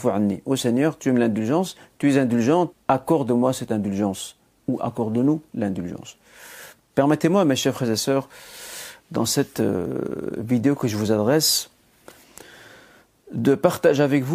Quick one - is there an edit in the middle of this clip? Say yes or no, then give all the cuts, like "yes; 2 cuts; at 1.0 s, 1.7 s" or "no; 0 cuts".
yes; 2 cuts; at 2.7 s, 6.8 s